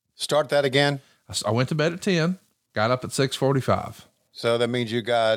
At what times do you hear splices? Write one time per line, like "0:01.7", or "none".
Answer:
0:02.7